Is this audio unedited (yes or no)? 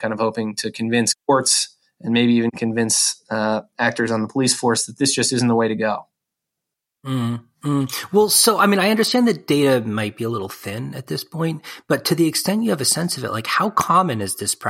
yes